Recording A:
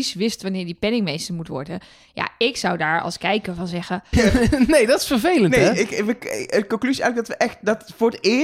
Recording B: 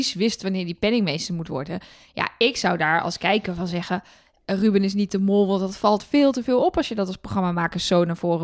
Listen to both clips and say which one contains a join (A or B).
A